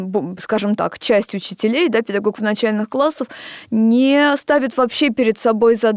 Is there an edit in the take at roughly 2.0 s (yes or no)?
no